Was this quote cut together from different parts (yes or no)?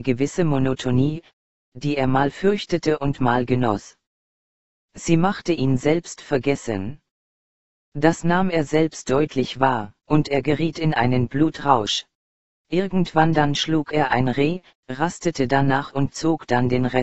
yes